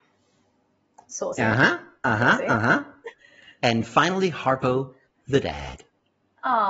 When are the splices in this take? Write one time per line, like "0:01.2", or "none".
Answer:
none